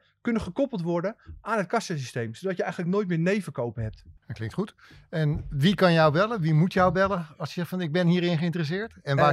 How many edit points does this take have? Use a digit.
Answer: 1